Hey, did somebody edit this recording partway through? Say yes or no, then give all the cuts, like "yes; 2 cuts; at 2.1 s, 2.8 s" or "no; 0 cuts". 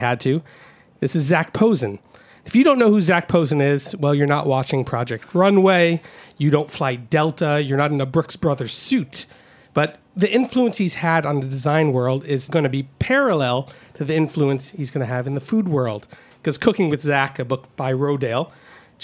yes; 1 cut; at 12.5 s